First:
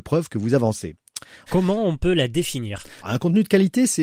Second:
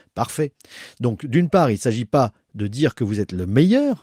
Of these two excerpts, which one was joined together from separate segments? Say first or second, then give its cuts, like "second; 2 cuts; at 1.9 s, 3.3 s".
first; 2 cuts; at 1.5 s, 3.0 s